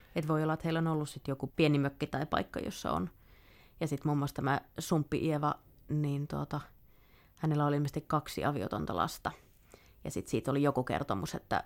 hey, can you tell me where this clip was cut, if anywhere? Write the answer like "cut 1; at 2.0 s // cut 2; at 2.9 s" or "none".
cut 1; at 1.5 s